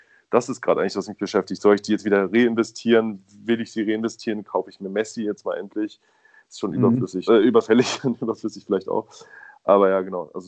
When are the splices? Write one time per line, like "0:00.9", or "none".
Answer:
0:07.3